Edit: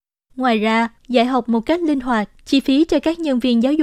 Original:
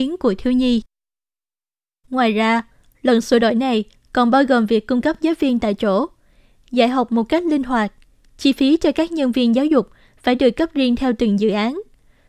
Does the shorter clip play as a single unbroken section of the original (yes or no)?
no